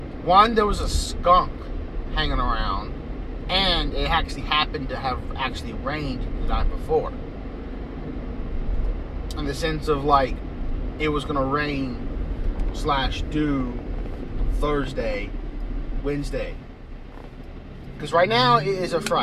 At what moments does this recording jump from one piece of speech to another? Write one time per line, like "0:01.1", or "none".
0:16.0

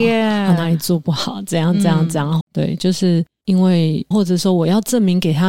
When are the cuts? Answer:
0:02.4
0:04.1

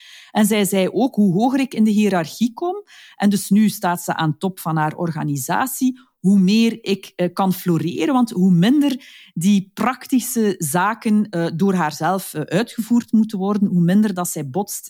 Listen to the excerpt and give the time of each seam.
none

